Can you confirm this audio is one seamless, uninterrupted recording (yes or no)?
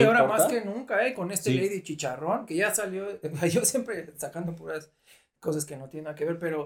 yes